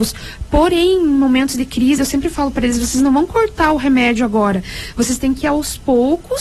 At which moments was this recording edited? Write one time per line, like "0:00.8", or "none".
0:02.0